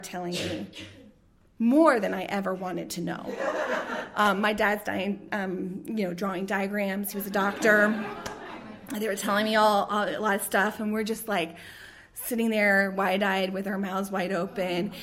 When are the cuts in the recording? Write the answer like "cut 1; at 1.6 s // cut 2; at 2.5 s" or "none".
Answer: none